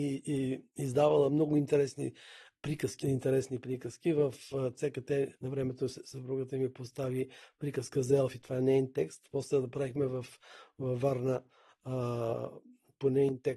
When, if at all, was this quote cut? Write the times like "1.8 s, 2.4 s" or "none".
3.0 s